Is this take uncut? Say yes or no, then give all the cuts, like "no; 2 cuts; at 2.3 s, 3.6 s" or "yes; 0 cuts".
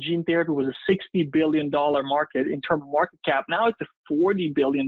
yes; 0 cuts